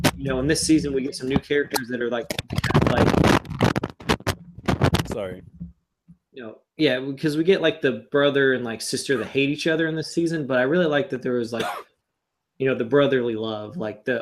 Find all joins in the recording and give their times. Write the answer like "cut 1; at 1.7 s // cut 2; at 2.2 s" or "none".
none